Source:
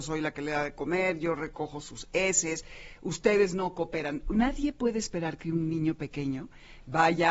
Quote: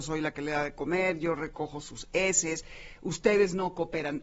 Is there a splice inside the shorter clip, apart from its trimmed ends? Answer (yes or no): no